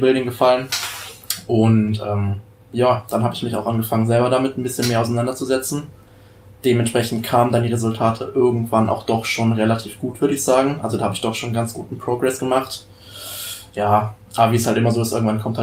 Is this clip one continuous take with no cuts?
yes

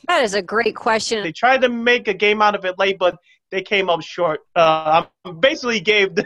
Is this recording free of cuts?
no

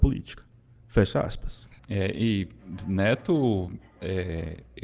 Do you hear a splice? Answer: yes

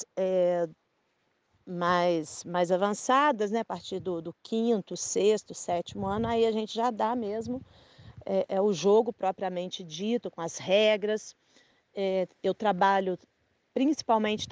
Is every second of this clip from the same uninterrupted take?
yes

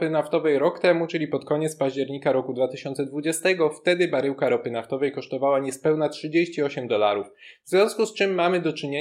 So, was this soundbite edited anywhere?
no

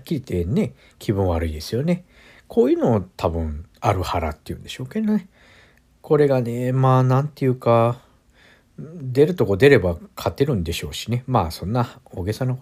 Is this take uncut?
yes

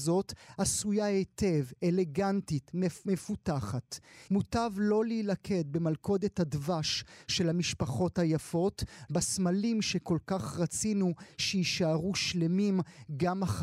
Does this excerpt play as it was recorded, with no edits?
no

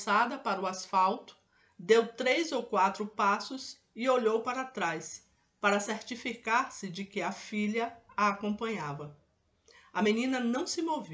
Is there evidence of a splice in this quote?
no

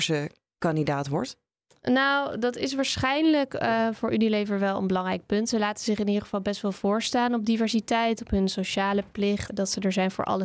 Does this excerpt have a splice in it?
yes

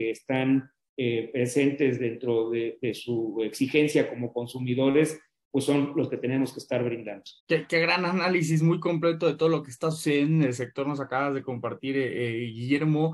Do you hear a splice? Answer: yes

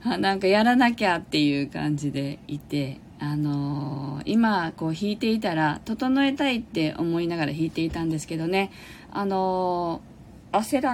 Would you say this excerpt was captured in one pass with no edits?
yes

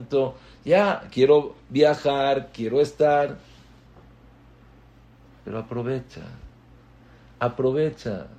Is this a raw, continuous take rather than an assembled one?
yes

